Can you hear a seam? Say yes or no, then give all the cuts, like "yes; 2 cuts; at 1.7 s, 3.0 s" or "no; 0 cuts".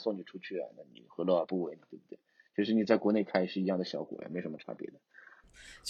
no; 0 cuts